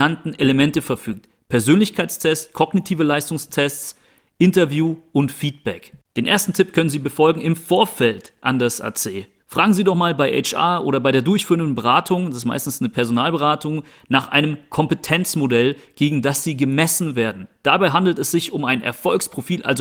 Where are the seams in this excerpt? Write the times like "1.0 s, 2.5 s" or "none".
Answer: 9.4 s